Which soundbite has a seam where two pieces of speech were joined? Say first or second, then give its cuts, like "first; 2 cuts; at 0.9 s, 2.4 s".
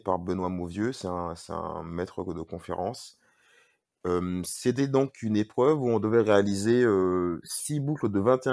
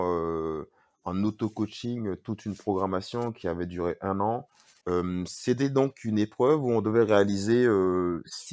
second; 1 cut; at 4.8 s